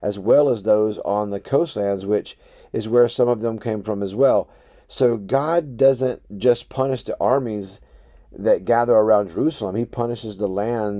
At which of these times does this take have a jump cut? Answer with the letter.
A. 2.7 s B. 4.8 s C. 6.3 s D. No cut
C